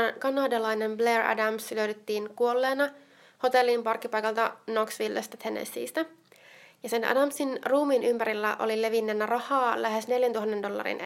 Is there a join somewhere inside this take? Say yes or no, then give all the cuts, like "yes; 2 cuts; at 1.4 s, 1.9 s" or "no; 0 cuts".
no; 0 cuts